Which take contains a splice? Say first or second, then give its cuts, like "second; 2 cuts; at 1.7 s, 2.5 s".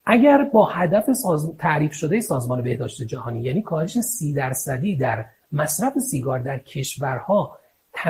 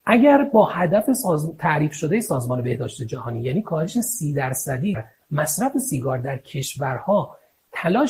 second; 1 cut; at 4.9 s